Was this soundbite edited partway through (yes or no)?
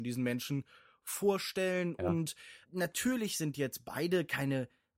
yes